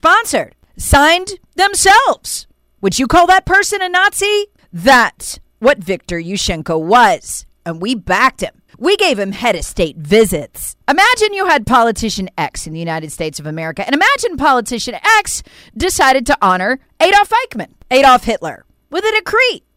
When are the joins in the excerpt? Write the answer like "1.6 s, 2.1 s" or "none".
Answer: 8.7 s, 10.8 s